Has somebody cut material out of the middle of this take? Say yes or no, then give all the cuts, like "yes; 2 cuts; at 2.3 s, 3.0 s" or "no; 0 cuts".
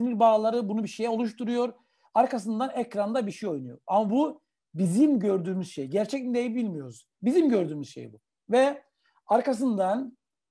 no; 0 cuts